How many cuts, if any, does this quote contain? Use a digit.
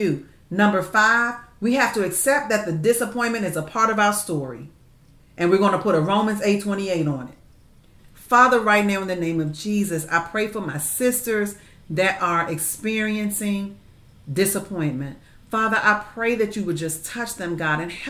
1